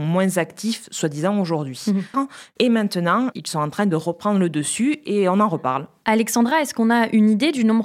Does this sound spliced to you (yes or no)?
yes